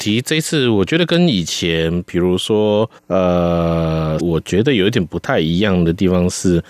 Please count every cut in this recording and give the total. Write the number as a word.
two